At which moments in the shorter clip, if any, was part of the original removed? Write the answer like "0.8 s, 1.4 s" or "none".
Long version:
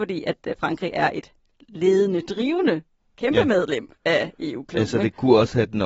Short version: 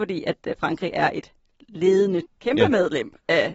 2.2 s